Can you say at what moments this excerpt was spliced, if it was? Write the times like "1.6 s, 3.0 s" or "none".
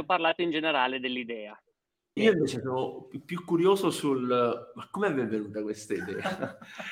2.2 s